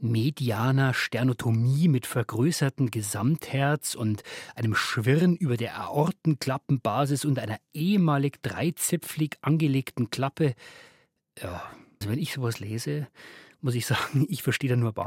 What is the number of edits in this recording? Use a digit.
1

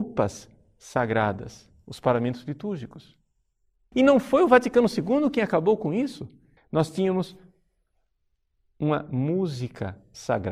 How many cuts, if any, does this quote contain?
2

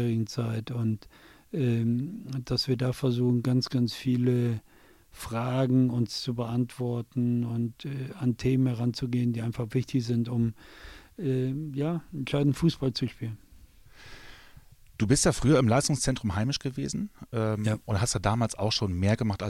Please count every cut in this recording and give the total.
0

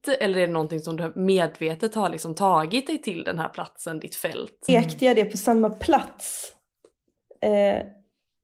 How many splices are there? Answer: 1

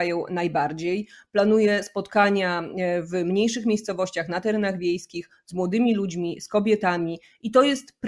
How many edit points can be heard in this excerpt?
0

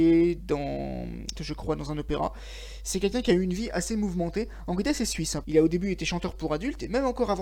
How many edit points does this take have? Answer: 2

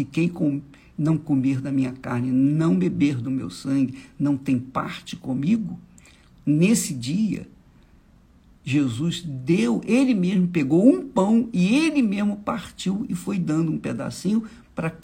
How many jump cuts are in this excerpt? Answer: 0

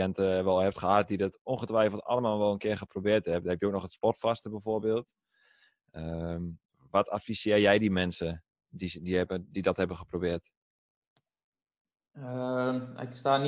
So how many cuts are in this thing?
0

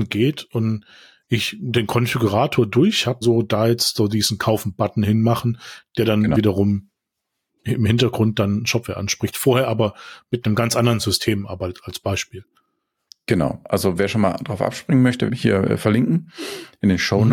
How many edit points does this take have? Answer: 2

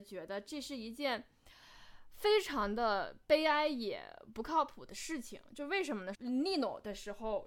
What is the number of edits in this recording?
1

